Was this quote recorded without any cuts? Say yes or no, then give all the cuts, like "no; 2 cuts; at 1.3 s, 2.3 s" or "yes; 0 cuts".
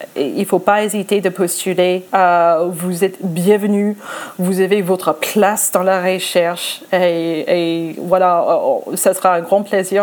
yes; 0 cuts